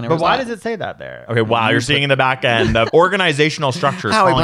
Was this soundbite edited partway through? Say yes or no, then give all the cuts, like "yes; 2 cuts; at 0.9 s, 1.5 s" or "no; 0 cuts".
yes; 2 cuts; at 1.3 s, 2.9 s